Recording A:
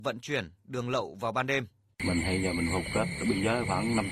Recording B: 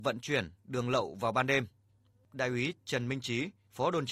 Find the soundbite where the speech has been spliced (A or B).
A